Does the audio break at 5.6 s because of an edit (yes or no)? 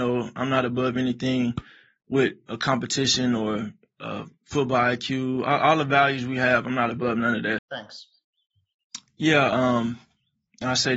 no